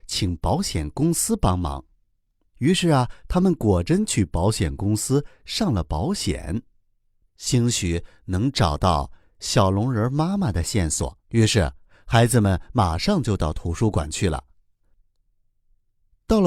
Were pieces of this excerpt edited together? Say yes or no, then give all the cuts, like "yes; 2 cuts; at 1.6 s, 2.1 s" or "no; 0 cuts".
yes; 2 cuts; at 7.3 s, 11.2 s